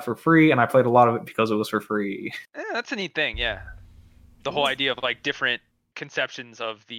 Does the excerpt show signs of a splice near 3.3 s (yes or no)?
no